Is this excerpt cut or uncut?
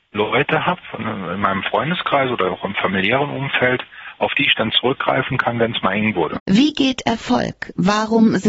cut